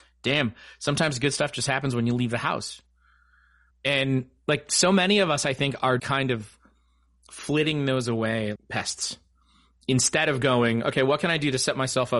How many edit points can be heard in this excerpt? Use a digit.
3